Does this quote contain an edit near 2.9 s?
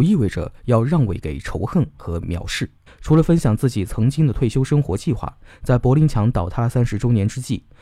yes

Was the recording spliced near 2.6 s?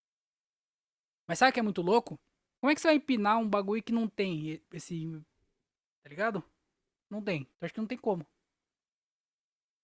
yes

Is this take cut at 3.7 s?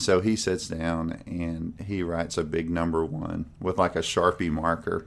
no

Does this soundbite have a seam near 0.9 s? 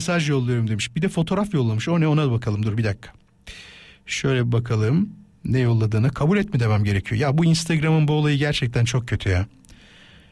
no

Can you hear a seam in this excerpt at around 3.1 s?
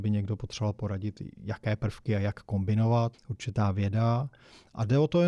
yes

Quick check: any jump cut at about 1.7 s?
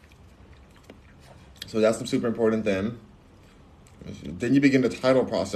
no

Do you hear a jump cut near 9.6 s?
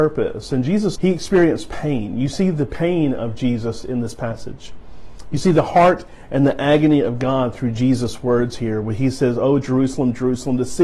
no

